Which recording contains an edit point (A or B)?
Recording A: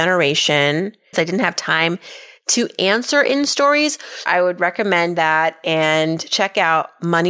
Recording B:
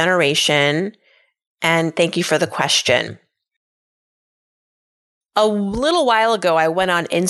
A